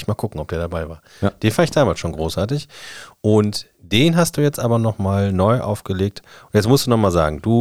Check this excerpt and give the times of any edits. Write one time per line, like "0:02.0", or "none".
none